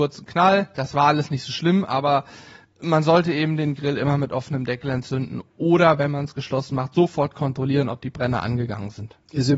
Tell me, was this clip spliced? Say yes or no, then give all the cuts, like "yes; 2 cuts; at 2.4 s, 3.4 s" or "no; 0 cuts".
no; 0 cuts